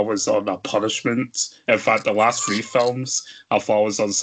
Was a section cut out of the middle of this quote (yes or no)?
no